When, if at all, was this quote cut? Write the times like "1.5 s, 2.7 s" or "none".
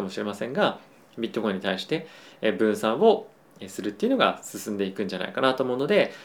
none